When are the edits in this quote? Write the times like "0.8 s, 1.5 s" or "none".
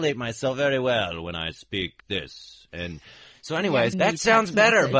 2.0 s, 3.9 s